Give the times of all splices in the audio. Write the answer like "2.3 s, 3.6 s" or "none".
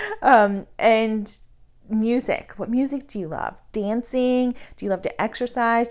none